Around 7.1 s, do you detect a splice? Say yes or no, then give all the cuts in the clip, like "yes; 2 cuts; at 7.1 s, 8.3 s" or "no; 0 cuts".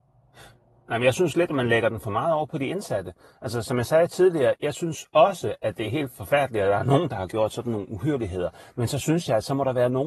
yes; 1 cut; at 7.1 s